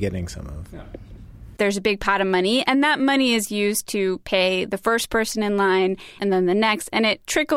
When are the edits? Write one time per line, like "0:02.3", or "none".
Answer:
0:01.6
0:06.2